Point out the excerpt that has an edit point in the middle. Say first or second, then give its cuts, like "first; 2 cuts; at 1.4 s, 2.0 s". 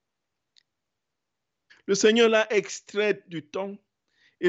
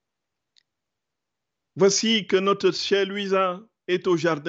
first; 1 cut; at 1.7 s